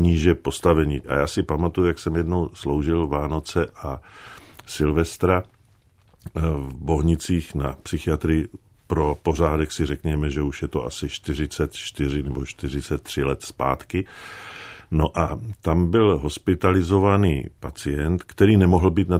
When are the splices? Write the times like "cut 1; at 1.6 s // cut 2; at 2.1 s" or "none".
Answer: none